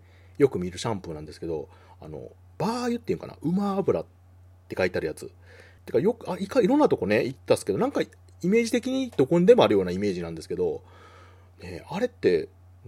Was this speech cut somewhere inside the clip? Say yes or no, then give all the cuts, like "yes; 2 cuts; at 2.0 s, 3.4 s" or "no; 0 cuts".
yes; 1 cut; at 5.8 s